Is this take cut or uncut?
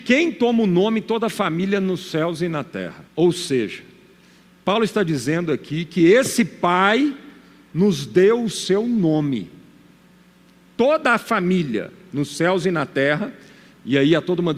cut